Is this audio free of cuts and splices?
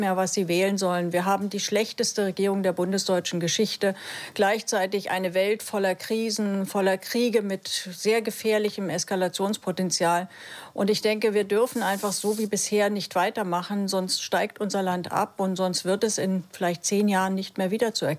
yes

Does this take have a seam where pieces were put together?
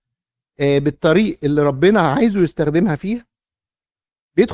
no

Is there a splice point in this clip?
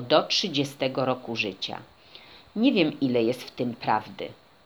no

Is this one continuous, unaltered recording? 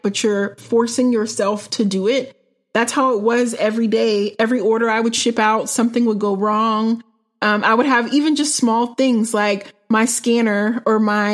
yes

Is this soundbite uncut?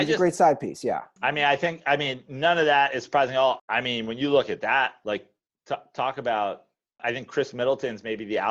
no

